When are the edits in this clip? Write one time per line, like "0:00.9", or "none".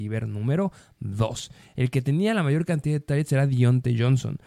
none